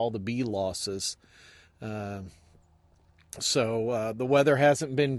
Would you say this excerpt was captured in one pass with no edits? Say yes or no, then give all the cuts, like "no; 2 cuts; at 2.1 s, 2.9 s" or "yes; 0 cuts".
yes; 0 cuts